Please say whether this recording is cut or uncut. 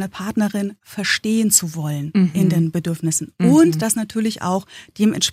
uncut